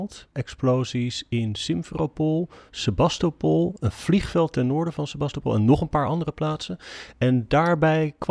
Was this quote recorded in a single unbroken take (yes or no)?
yes